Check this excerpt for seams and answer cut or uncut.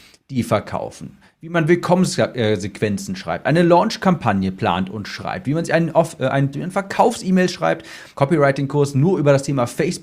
cut